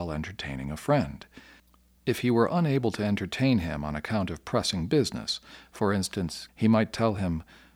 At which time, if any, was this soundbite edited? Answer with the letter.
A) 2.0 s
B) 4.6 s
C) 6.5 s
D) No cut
C